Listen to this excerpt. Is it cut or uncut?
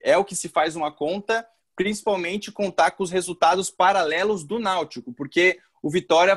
uncut